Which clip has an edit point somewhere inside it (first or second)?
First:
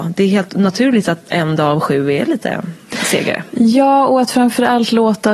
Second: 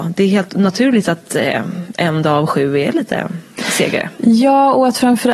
first